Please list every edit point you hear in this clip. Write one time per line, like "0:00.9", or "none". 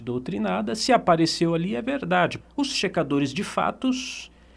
0:02.4